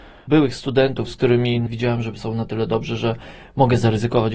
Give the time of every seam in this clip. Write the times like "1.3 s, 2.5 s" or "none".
none